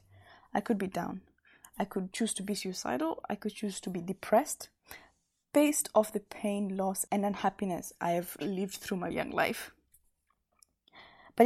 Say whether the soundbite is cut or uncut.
cut